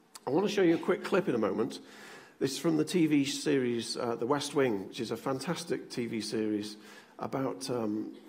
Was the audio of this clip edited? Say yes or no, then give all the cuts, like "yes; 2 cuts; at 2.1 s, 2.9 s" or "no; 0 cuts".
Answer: no; 0 cuts